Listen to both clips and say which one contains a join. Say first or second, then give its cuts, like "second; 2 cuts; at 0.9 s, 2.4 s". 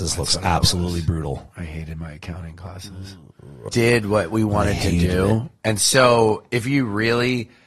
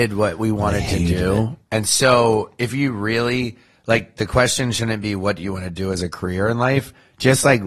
first; 1 cut; at 3.7 s